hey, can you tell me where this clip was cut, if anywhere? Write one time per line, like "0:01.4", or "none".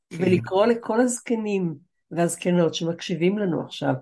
none